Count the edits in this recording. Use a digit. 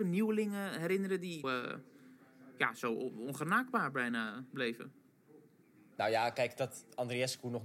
1